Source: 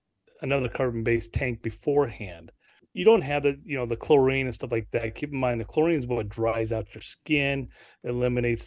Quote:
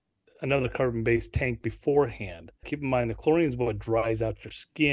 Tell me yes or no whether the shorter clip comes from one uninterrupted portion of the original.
no